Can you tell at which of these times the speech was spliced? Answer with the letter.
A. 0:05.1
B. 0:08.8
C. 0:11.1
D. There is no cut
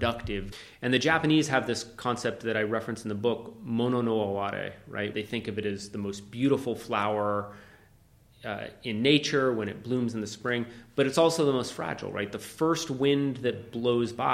A